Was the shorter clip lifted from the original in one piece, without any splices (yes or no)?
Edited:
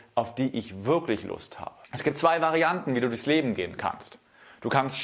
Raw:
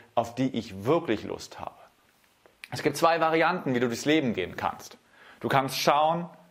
no